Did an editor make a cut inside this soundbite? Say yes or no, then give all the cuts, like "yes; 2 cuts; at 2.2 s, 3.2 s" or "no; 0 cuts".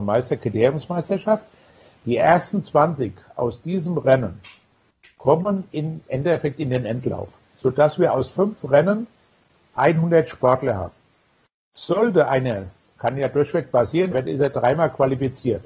yes; 1 cut; at 14.1 s